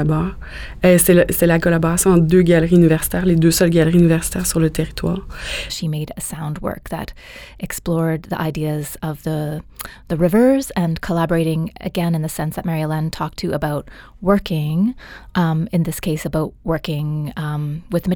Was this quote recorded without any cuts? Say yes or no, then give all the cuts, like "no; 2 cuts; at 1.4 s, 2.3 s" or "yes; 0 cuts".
no; 1 cut; at 5.7 s